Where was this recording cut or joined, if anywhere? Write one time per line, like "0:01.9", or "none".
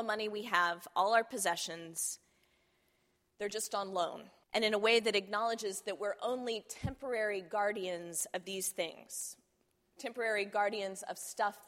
0:04.4

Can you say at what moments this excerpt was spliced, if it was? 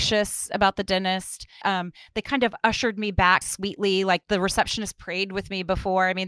0:01.6
0:03.4

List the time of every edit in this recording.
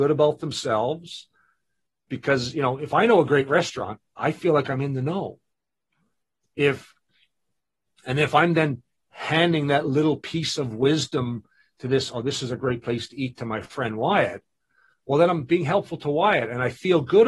none

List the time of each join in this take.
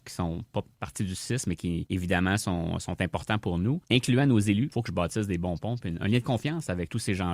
0:04.7
0:05.8

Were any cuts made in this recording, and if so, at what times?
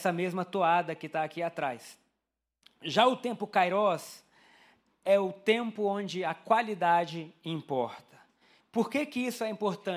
0:08.6

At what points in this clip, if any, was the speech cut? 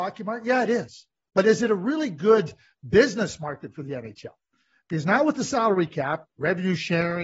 none

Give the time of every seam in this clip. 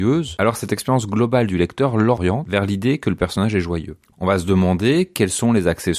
0:04.1

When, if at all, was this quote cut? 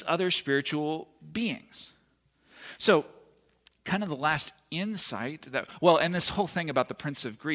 none

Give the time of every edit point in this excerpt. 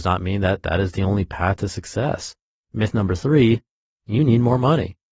0:02.5

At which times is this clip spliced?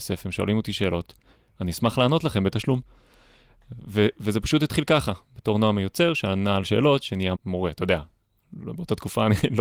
0:07.3

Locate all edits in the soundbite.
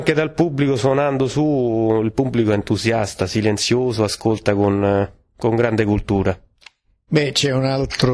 none

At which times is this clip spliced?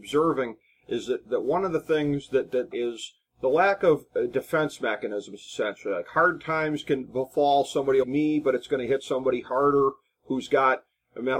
0:02.7
0:08.0

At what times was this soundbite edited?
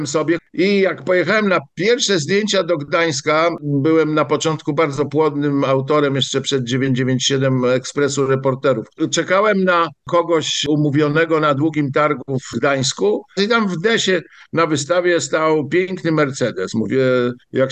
none

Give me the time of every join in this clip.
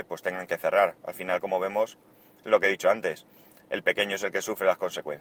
none

